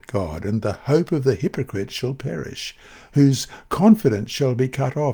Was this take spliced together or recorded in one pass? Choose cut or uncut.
uncut